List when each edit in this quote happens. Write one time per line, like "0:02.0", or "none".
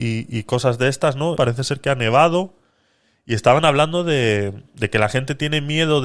0:01.3